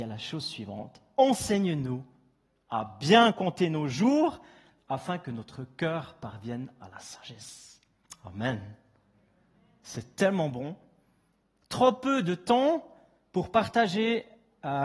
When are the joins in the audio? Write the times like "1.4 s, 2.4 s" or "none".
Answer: none